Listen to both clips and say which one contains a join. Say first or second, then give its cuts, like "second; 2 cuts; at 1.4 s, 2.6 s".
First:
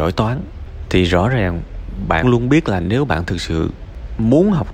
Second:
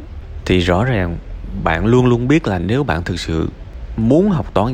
first; 1 cut; at 2.2 s